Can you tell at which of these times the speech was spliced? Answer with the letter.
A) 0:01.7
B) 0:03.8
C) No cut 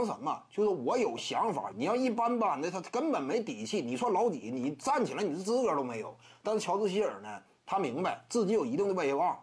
A